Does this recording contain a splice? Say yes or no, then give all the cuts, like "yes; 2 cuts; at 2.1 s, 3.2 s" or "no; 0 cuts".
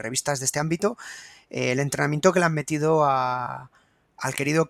no; 0 cuts